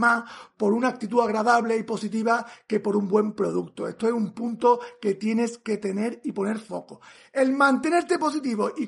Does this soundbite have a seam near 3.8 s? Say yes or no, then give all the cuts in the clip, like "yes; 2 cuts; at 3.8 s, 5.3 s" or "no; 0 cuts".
no; 0 cuts